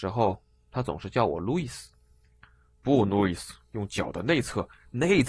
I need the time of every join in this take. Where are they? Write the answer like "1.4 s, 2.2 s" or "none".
none

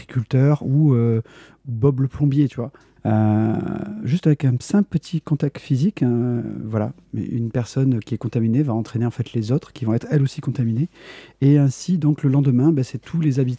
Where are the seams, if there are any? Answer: 3.0 s

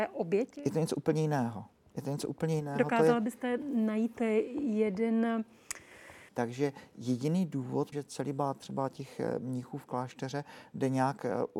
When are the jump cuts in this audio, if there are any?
6.3 s, 7.9 s

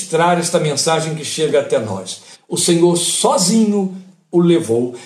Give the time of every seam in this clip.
2.3 s

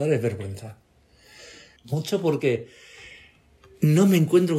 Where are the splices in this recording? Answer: 1.8 s

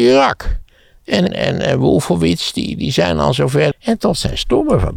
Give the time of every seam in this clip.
1.3 s, 3.7 s

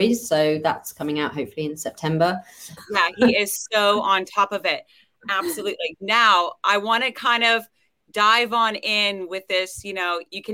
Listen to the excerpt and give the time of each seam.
2.8 s

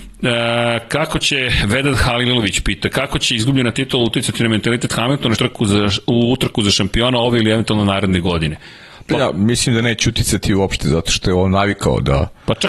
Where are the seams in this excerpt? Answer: 5.4 s

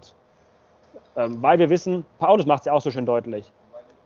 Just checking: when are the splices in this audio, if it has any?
1.0 s

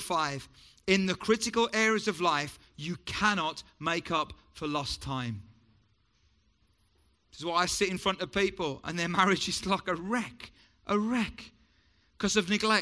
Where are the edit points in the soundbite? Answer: none

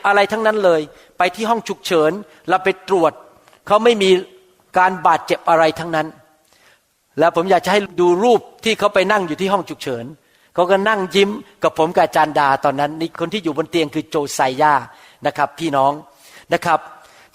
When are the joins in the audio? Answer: none

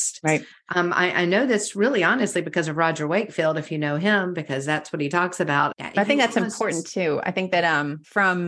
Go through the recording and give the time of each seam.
5.7 s

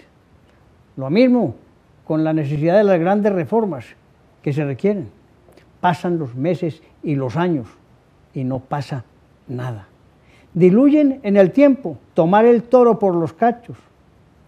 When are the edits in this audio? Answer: 12.1 s

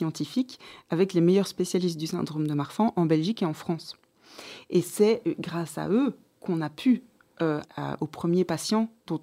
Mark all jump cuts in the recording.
7.6 s

